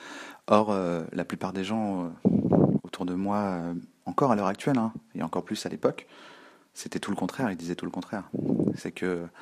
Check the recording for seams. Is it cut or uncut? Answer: uncut